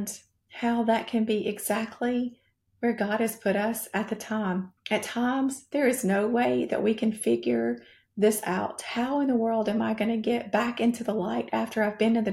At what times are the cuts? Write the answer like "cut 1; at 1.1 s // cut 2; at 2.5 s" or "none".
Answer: cut 1; at 4.8 s